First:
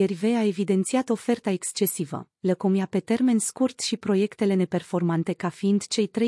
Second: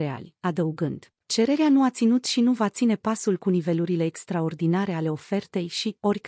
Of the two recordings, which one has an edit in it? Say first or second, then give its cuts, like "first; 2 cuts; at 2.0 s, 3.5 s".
second; 1 cut; at 1.2 s